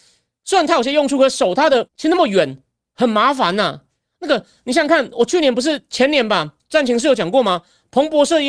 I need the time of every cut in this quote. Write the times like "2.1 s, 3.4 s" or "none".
1.9 s